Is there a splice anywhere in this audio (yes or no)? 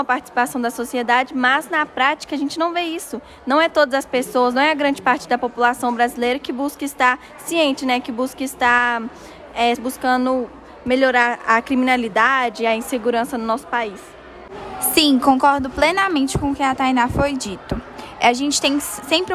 yes